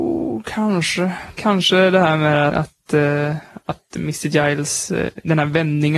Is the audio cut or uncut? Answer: cut